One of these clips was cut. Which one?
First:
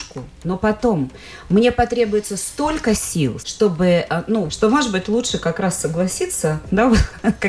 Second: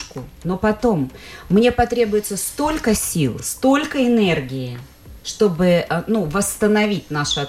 first; 2 cuts; at 3.4 s, 4.5 s

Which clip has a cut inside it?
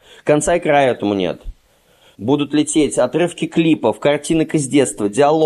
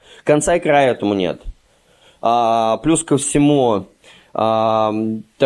first; 1 cut; at 2.1 s

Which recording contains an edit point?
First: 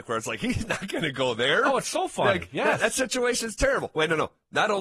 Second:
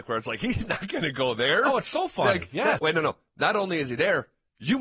second; 1 cut; at 2.8 s

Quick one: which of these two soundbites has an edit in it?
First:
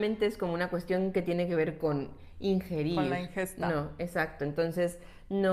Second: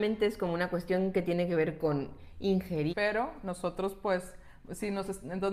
second; 1 cut; at 2.9 s

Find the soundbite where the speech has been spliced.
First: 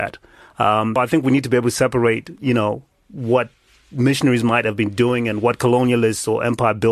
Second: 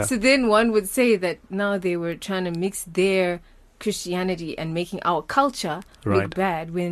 first; 1 cut; at 1.0 s

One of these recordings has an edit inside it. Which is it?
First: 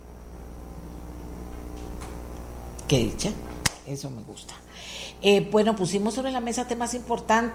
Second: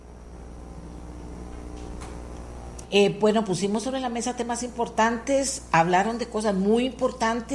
second; 1 cut; at 2.8 s

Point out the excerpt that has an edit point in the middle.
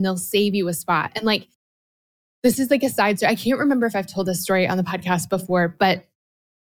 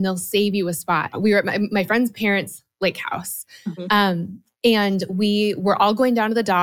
second; 1 cut; at 1.1 s

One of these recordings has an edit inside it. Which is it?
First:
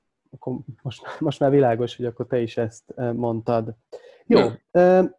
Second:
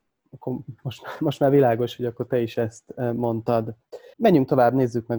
second; 1 cut; at 4.1 s

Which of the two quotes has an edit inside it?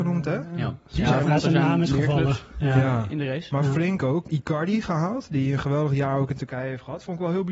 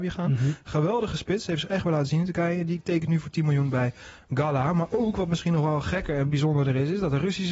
first; 2 cuts; at 1.2 s, 4.3 s

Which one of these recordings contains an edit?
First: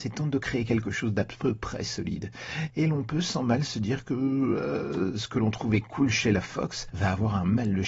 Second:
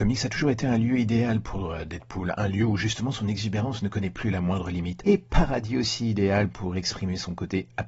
first; 1 cut; at 2.7 s

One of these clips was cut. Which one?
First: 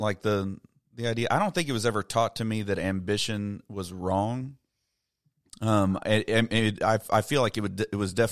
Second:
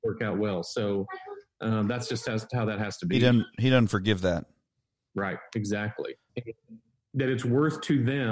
second; 1 cut; at 6.3 s

